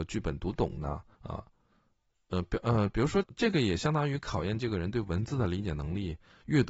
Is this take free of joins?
no; 2 cuts; at 1.1 s, 3.2 s

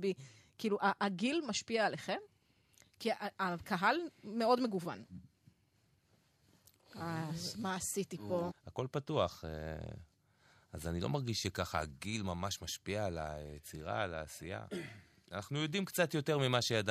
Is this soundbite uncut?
no; 1 cut; at 8.5 s

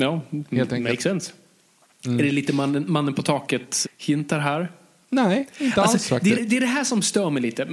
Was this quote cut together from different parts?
yes; 2 cuts; at 3.8 s, 6.4 s

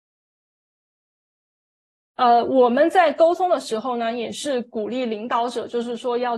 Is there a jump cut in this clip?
no; 0 cuts

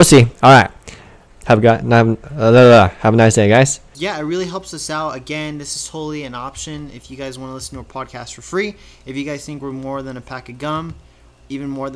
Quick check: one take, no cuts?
no; 2 cuts; at 1.3 s, 3.9 s

